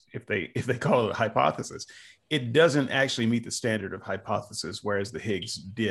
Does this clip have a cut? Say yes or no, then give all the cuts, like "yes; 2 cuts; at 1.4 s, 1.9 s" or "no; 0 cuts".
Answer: no; 0 cuts